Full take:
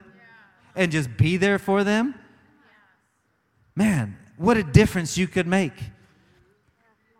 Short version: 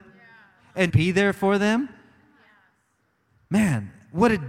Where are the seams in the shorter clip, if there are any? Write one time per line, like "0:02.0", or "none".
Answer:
0:00.9